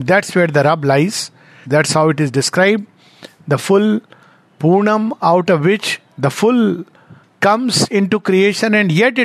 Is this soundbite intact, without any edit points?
no; 1 cut; at 1.6 s

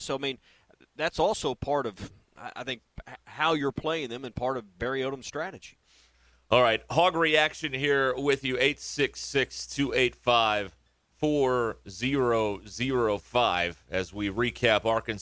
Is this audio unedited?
yes; 0 cuts

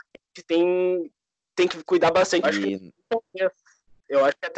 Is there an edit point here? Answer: yes; 1 cut; at 2.4 s

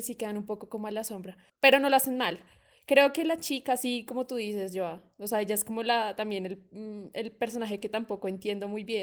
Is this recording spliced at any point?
no; 0 cuts

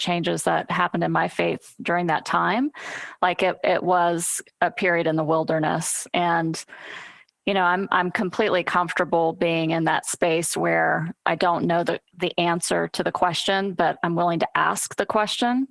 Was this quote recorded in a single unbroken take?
yes; 0 cuts

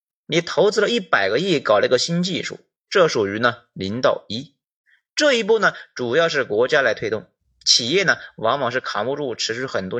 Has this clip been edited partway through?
no; 0 cuts

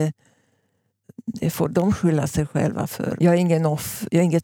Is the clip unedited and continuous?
no; 1 cut; at 3.2 s

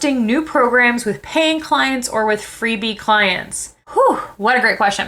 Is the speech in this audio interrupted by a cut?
yes; 1 cut; at 3.8 s

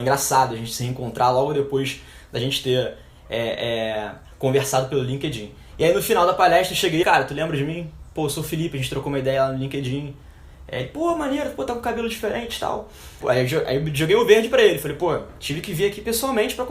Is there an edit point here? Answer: yes; 3 cuts; at 5.7 s, 7.0 s, 13.2 s

